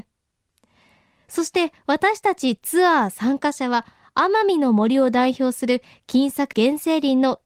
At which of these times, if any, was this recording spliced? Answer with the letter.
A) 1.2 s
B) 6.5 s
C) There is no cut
B